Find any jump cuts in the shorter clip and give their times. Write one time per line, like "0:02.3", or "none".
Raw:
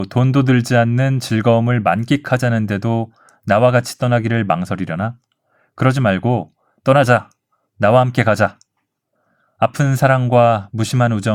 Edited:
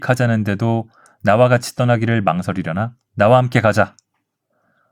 0:03.1